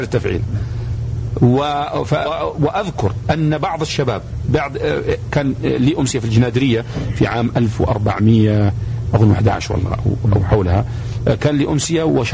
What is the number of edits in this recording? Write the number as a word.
one